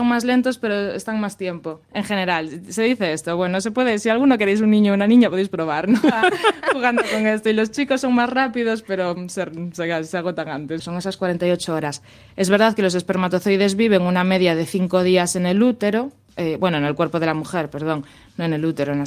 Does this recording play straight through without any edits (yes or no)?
no